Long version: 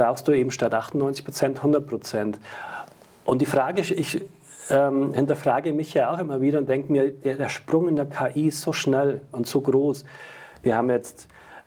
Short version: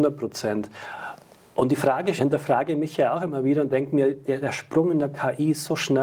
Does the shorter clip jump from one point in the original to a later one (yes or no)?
yes